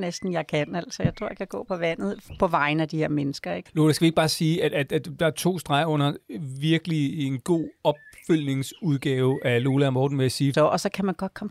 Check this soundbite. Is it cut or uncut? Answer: cut